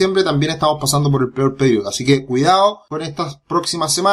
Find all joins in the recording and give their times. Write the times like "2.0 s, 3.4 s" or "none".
none